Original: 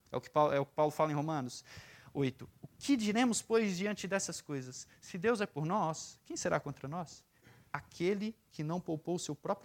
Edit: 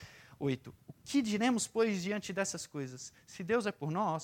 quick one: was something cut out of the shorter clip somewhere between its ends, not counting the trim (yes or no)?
no